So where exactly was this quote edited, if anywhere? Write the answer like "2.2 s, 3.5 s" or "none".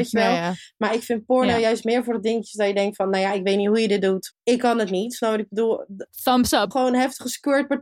4.3 s, 6.7 s